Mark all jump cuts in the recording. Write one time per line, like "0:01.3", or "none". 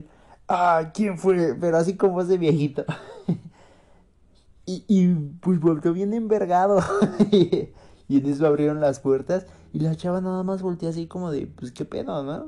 none